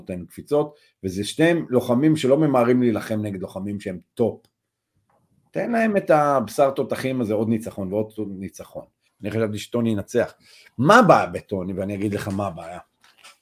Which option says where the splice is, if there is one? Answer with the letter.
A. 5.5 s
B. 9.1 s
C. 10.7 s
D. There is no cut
B